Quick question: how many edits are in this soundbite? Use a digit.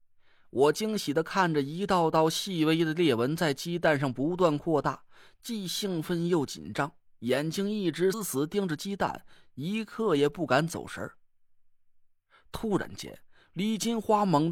1